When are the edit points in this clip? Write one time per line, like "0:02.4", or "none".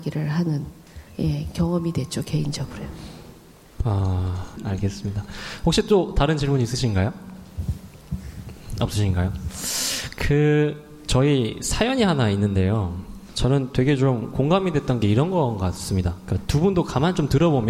none